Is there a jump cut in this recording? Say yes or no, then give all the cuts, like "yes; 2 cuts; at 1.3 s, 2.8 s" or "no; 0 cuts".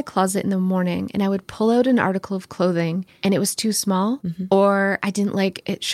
no; 0 cuts